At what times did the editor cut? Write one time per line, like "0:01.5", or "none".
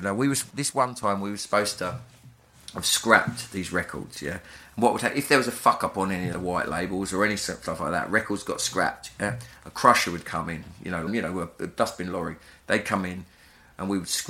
0:06.3
0:11.1